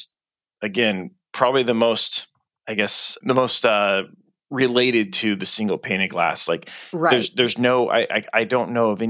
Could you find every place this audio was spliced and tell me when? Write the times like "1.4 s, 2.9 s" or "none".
none